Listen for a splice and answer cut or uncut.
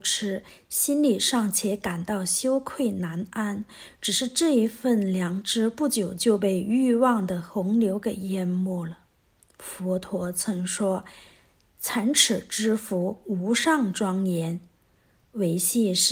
uncut